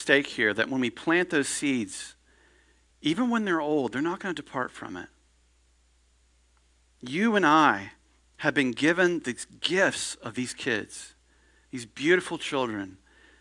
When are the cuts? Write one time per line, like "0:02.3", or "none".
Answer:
none

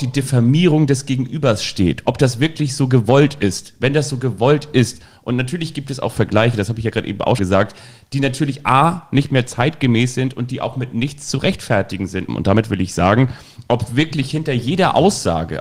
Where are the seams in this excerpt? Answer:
0:07.4
0:12.3

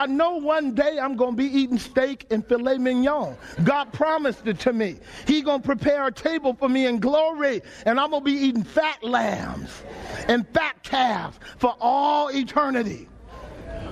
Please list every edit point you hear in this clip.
none

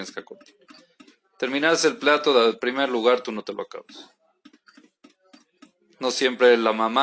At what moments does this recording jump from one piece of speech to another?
none

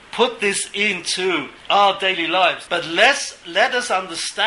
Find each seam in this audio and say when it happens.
0:01.6
0:02.7

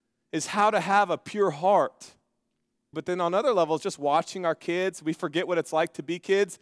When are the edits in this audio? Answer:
0:02.9

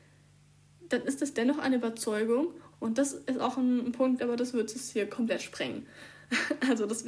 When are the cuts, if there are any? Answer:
0:02.7
0:04.2

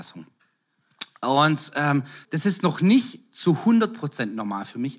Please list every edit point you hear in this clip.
0:02.2

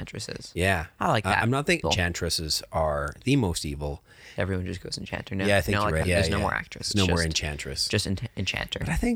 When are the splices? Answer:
0:01.8
0:04.4
0:06.0

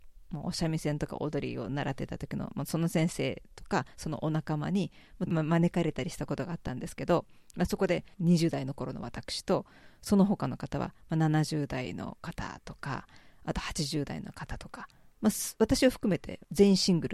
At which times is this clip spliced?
0:05.3

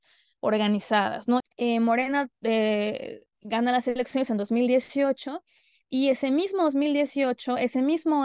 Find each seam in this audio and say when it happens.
0:01.4
0:03.3

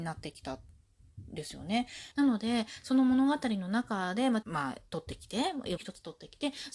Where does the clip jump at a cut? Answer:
0:02.1
0:04.4
0:05.8

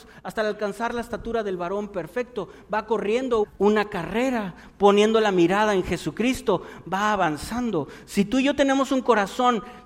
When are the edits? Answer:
0:03.4

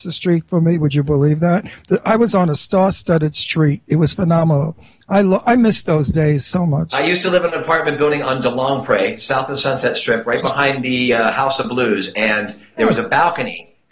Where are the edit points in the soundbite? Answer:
none

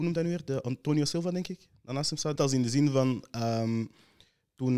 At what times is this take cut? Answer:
0:02.4

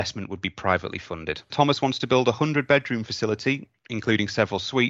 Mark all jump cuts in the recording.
0:01.5

